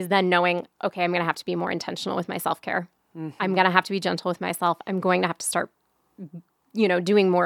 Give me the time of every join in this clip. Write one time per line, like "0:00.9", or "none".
none